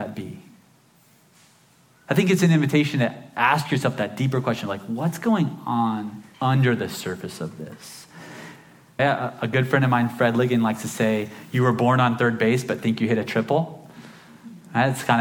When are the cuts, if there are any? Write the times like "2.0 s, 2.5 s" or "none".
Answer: 6.3 s, 9.0 s